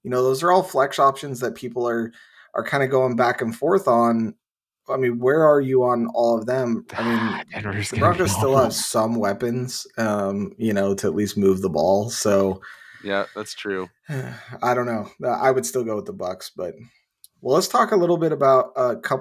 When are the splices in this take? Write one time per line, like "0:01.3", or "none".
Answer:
0:06.9